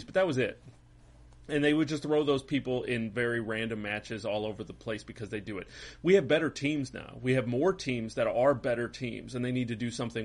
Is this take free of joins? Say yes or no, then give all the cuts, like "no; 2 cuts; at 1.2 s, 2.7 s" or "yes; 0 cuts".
yes; 0 cuts